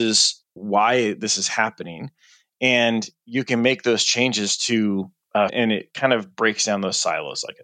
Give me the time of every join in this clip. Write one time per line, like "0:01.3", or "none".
0:05.5